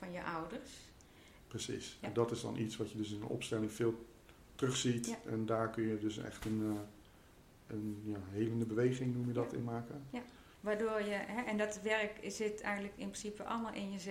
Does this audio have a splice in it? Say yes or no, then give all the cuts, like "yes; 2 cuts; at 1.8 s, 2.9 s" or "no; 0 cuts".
yes; 1 cut; at 1.4 s